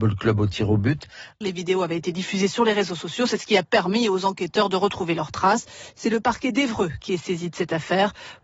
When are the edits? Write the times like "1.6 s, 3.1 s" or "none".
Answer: 1.4 s